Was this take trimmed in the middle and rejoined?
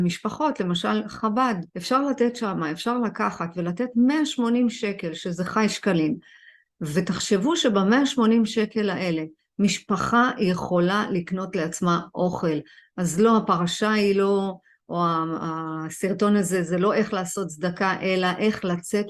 yes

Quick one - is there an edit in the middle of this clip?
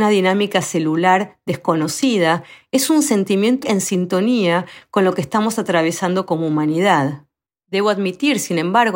yes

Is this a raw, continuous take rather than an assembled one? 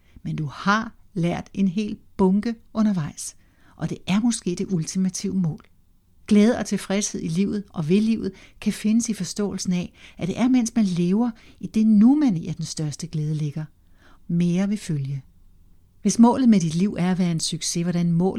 no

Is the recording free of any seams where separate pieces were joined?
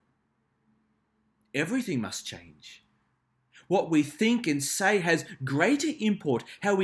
yes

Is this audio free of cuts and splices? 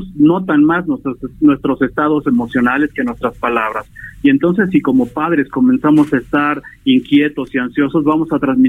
yes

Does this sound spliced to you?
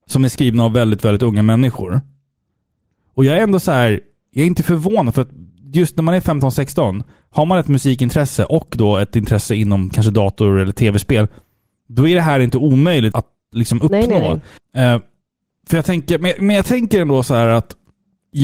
yes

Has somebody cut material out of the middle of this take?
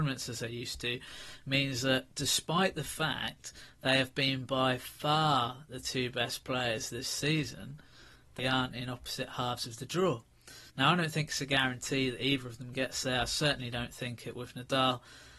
yes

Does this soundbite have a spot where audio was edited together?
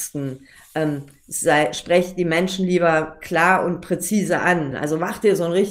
yes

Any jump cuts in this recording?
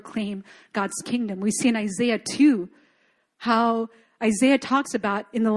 no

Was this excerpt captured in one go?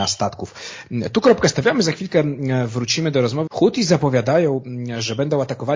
no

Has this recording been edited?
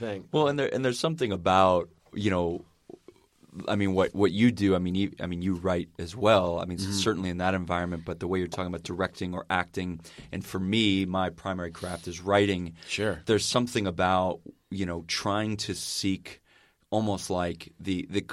no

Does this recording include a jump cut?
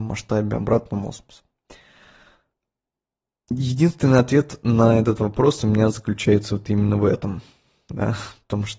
no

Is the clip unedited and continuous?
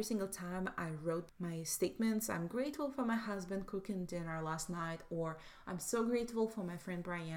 yes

